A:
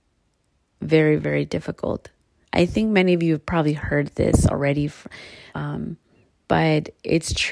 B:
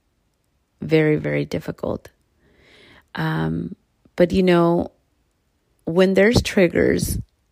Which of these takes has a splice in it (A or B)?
A